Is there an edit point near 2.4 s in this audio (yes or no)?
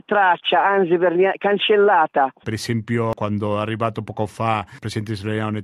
yes